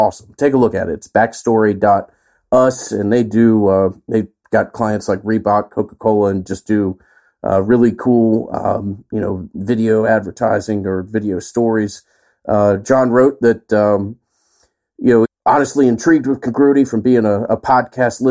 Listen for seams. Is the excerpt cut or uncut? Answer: cut